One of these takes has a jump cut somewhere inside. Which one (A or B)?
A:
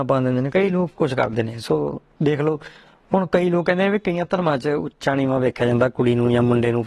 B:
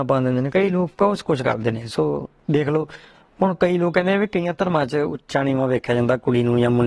A